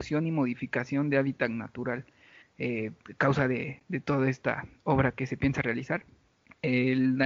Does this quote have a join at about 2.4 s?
yes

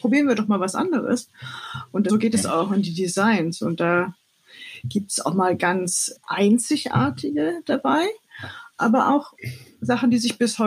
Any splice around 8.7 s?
no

